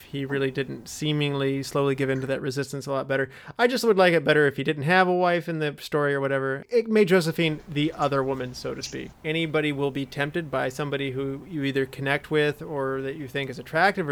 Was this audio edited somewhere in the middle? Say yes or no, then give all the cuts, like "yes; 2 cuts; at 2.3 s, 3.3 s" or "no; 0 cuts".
yes; 1 cut; at 9.1 s